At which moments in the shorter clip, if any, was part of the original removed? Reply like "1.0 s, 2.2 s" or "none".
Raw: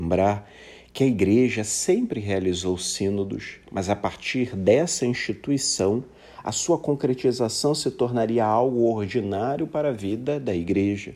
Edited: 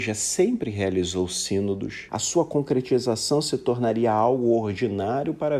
2.1 s

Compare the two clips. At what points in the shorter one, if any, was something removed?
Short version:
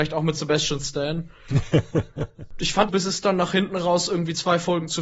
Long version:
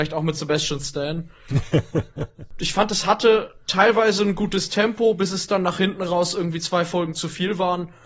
2.9 s

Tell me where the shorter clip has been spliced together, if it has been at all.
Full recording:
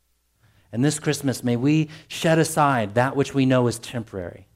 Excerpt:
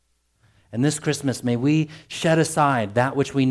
none

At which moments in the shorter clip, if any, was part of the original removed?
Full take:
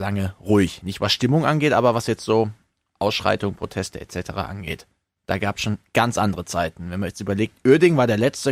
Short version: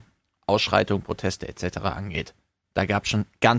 none

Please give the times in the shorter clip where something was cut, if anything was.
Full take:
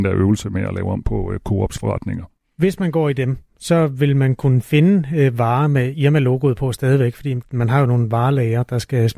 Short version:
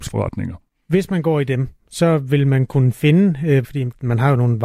3.6 s

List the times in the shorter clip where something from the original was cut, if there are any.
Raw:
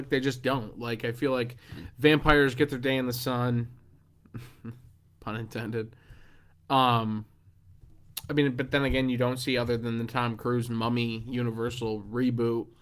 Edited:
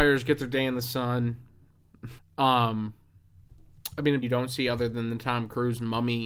2.2 s, 4.2 s

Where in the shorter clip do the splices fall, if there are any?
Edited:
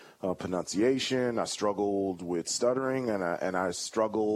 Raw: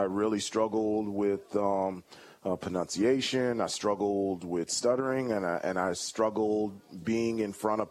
none

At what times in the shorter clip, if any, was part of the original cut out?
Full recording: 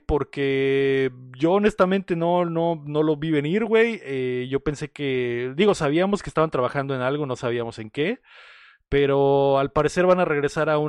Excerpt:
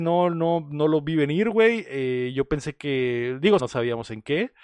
3.6 s

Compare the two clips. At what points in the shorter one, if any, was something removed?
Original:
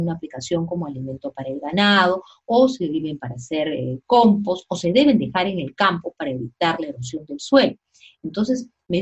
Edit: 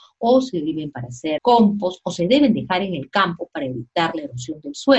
1.4 s

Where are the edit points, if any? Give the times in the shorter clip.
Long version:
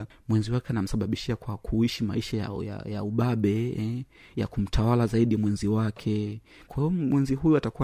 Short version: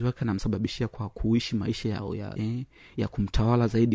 2.4 s

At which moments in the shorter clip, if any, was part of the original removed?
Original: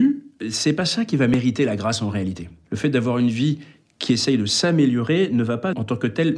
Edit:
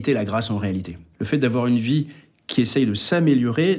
none

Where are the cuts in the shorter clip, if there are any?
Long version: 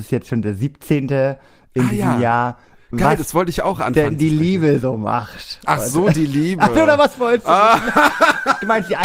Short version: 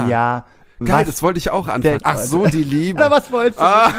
2.0 s, 3.0 s

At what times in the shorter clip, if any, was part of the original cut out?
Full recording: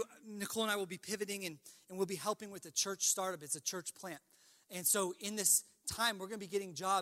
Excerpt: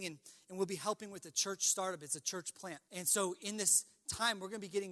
2.9 s

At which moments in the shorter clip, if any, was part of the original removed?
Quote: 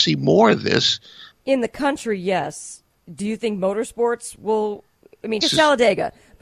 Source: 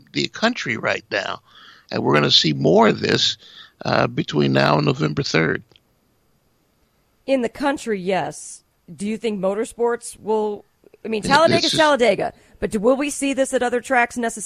1.3 s, 5.4 s

